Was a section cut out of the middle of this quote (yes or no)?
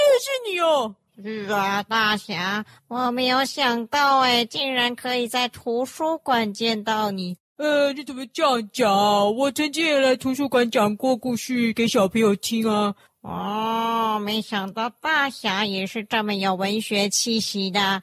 no